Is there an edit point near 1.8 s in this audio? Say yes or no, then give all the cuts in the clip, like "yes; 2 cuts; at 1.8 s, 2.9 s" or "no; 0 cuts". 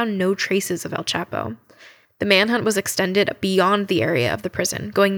no; 0 cuts